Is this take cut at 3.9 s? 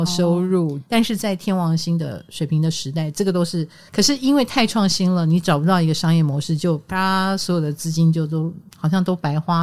yes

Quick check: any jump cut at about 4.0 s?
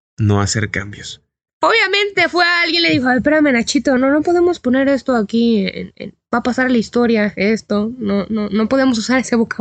yes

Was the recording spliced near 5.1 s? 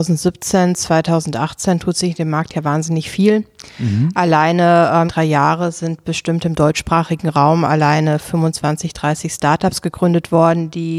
yes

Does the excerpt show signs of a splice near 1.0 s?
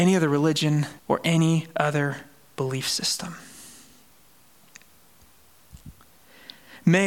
yes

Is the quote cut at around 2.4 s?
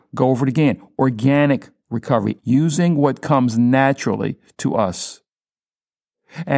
yes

